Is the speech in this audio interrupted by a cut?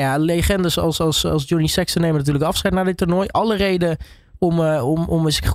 no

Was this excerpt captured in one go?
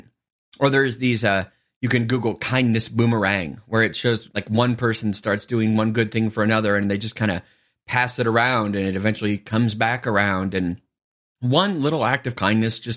yes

